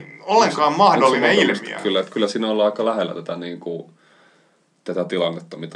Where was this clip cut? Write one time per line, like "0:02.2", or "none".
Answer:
none